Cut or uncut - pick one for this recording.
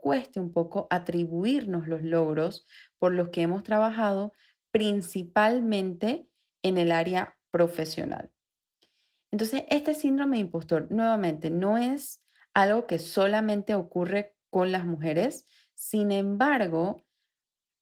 uncut